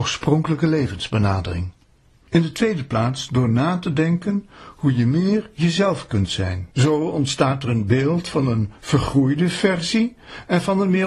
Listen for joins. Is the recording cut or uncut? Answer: cut